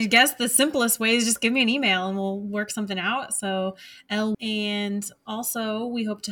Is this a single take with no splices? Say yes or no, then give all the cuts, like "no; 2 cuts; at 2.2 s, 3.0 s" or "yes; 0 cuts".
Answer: no; 1 cut; at 4.3 s